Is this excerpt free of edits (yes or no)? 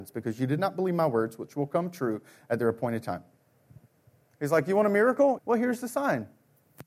no